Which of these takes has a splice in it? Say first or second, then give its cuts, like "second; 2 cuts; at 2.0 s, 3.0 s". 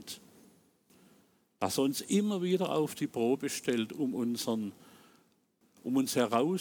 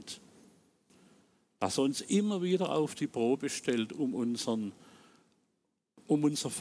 first; 1 cut; at 5.6 s